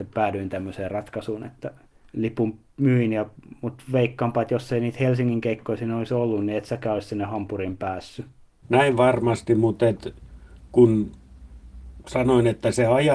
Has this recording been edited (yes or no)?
yes